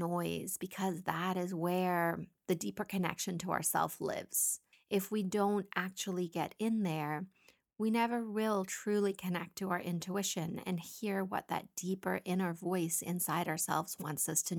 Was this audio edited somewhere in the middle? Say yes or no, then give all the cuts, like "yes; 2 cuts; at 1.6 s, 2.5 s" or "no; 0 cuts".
no; 0 cuts